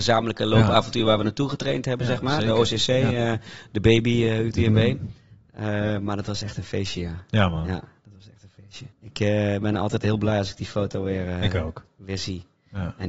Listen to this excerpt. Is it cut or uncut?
cut